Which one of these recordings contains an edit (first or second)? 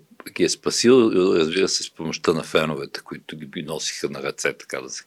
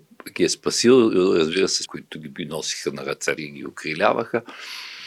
second